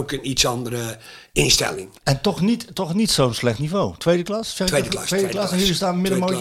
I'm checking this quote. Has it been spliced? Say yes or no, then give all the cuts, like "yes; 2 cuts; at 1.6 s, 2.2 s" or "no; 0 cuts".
no; 0 cuts